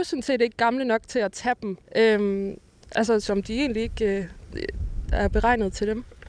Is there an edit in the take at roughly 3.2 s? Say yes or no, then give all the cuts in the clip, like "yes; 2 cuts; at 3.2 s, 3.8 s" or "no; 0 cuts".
yes; 3 cuts; at 1.8 s, 3.2 s, 5.1 s